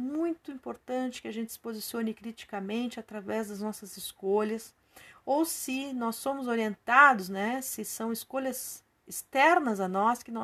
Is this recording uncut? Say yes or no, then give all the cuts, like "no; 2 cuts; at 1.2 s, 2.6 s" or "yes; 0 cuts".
yes; 0 cuts